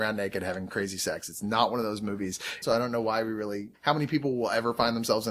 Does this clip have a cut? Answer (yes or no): yes